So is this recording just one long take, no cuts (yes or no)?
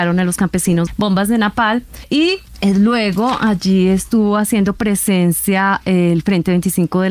yes